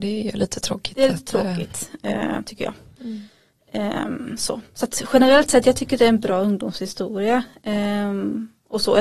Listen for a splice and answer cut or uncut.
uncut